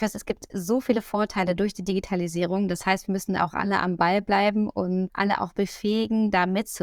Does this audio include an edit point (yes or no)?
no